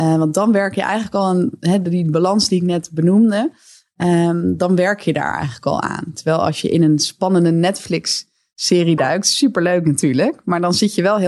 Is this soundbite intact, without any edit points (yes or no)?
yes